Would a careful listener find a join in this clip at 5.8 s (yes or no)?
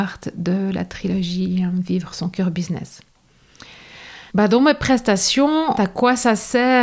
yes